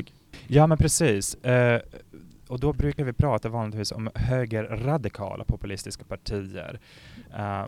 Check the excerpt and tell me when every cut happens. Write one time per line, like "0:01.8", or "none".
none